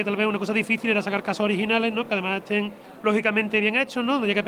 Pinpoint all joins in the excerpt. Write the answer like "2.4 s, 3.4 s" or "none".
none